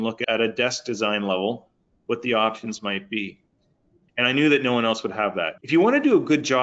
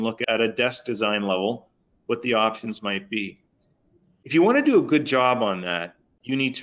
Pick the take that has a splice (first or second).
first